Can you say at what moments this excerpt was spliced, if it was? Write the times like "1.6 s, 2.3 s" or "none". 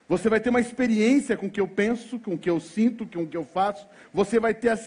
none